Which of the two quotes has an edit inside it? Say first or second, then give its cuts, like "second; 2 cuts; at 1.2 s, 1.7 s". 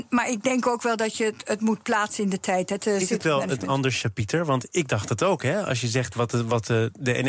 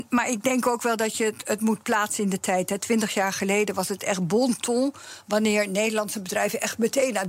first; 1 cut; at 2.8 s